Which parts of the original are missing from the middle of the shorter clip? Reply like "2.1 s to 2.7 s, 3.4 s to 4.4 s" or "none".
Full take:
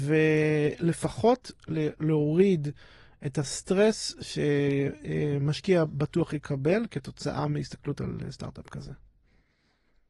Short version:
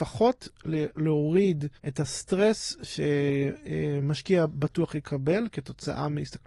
2.8 s to 3.2 s